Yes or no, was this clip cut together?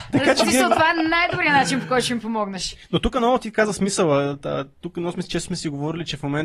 no